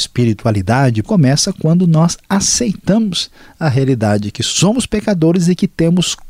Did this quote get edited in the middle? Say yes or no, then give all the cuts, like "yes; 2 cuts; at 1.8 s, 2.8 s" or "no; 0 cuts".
yes; 1 cut; at 1.0 s